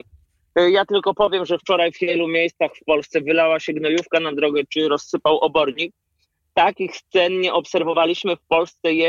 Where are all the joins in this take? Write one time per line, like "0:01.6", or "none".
none